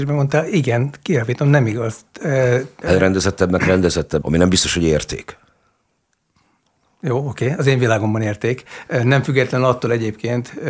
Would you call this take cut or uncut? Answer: cut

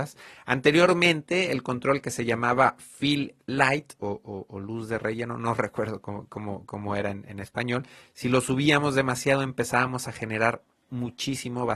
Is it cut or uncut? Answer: uncut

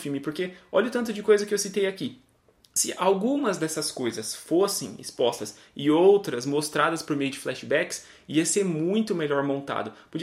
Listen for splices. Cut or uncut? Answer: uncut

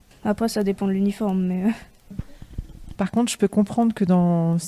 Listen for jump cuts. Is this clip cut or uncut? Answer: cut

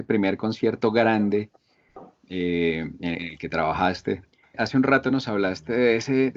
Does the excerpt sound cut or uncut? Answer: cut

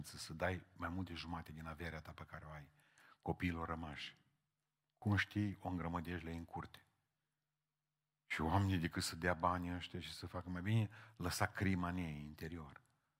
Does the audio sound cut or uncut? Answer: uncut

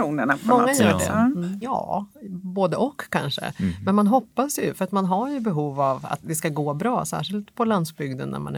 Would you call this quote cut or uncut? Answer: cut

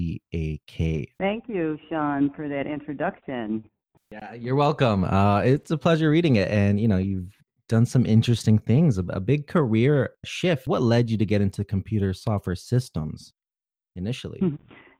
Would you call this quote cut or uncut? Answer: cut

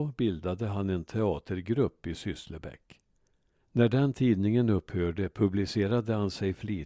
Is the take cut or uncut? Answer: cut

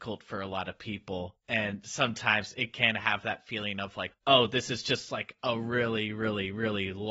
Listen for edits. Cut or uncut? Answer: uncut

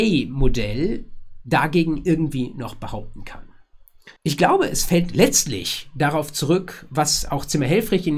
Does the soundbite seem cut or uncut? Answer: cut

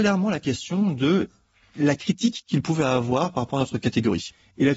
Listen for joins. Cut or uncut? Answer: uncut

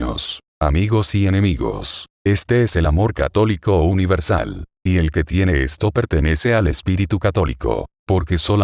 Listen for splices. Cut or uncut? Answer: uncut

